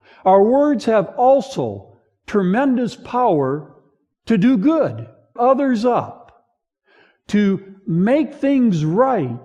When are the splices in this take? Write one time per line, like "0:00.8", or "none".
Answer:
0:05.4